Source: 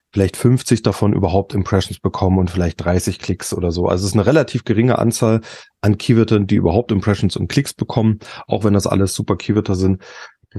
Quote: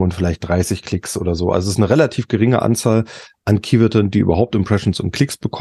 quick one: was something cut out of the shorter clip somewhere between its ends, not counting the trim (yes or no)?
no